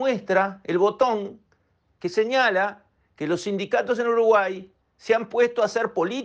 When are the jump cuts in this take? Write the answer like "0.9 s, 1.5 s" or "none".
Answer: 4.8 s